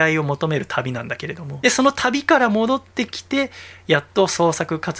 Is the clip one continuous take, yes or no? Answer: no